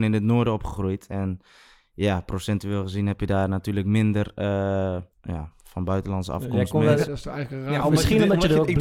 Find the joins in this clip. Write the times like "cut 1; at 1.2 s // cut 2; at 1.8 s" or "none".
cut 1; at 5.1 s // cut 2; at 7.1 s

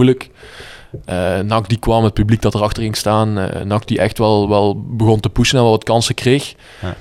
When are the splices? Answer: none

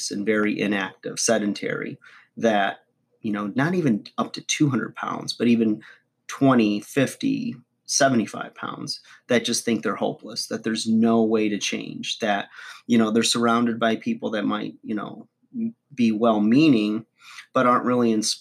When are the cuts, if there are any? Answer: none

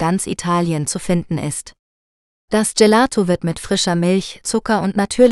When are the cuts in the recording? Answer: cut 1; at 4.4 s

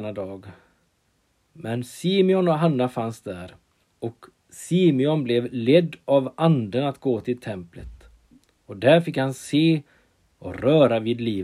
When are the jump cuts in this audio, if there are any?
cut 1; at 3.8 s

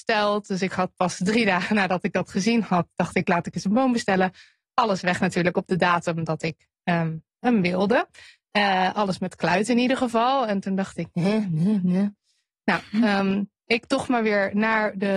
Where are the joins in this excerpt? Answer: none

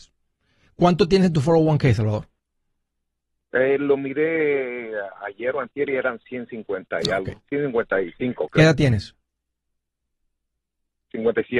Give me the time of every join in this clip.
none

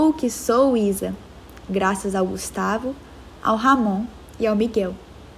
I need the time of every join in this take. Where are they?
none

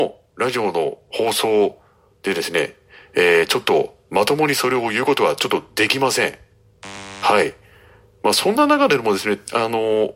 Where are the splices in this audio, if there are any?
none

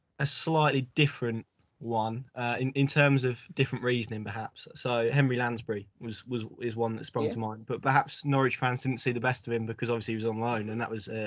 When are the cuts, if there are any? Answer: none

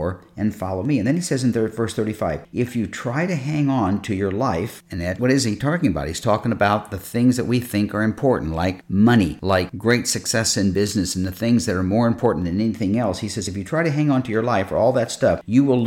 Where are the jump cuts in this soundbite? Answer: none

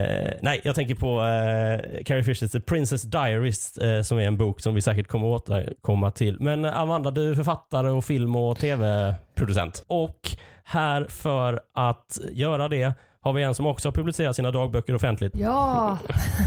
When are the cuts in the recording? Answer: cut 1; at 9.8 s // cut 2; at 15.3 s

